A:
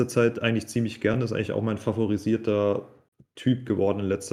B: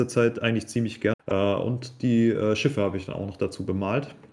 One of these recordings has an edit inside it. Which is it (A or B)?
B